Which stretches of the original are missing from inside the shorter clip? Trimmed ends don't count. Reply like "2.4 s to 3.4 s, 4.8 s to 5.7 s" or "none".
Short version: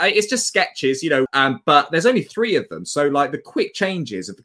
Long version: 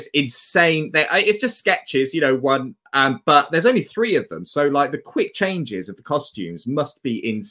2.4 s to 2.9 s

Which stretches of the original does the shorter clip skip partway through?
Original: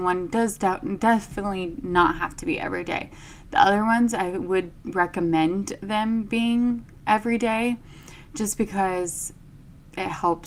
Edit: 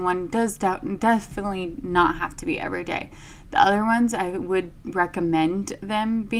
none

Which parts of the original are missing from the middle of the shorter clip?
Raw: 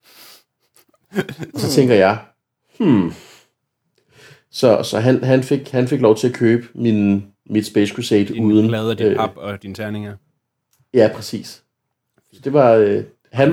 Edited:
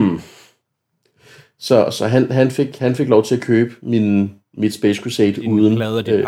none

